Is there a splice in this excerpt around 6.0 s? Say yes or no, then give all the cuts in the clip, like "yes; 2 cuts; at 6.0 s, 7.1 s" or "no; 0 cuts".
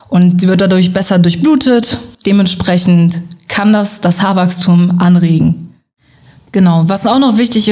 no; 1 cut; at 2.1 s